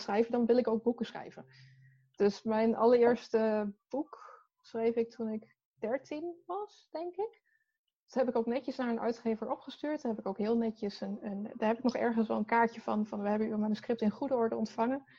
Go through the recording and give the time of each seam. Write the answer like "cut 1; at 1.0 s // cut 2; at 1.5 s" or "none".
none